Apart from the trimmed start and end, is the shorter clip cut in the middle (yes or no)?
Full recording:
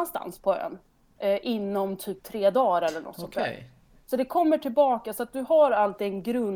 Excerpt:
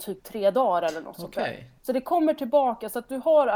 yes